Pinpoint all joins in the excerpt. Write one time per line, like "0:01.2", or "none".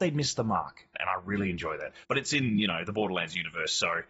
0:00.9
0:02.0